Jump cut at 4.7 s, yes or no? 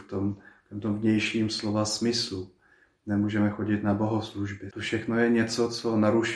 yes